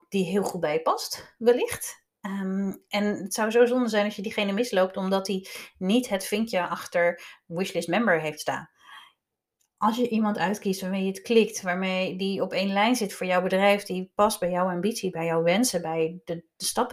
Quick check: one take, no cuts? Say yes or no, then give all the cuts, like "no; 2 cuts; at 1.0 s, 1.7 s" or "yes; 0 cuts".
yes; 0 cuts